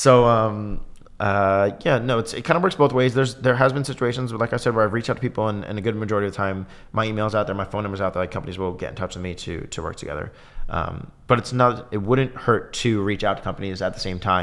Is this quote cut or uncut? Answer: uncut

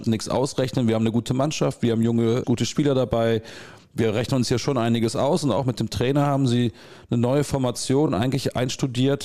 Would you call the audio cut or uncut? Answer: uncut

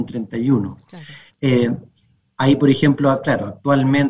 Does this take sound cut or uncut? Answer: cut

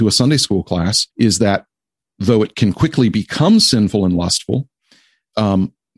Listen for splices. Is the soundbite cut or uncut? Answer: cut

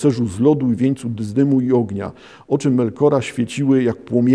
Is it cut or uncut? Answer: uncut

